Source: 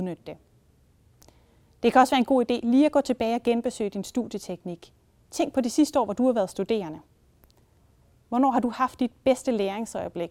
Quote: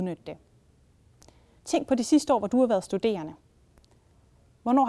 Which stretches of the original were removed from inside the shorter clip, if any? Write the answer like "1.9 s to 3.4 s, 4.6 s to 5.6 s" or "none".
1.6 s to 5.2 s